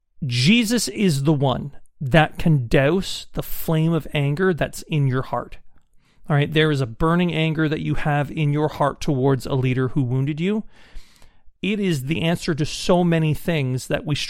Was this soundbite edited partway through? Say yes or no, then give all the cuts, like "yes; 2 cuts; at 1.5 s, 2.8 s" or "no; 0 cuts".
yes; 1 cut; at 11.6 s